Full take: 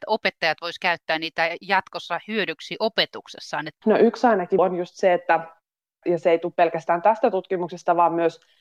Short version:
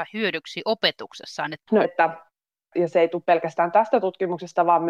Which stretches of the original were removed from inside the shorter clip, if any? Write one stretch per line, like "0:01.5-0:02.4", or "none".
0:04.0-0:05.1

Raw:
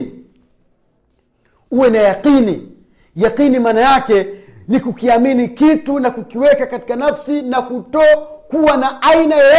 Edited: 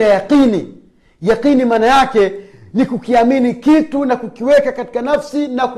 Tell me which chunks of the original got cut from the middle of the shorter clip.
none

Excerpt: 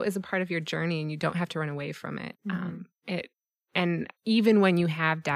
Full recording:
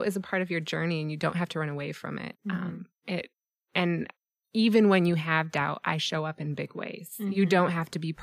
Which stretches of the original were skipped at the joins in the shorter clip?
0:04.2-0:04.4

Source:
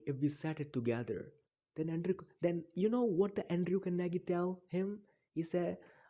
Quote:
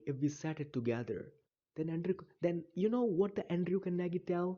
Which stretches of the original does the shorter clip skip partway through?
none

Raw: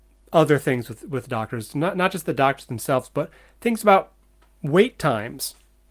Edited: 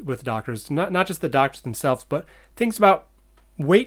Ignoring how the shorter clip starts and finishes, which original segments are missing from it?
none

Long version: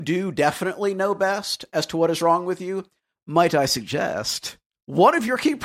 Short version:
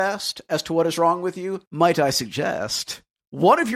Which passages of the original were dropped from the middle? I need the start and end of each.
0:02.9-0:03.2

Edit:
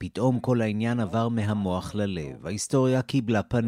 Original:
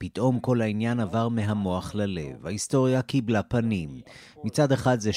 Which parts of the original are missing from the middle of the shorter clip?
none

